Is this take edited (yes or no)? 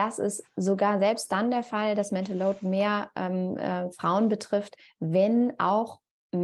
no